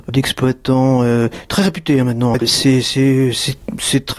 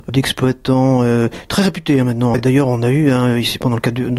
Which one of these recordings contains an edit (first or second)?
first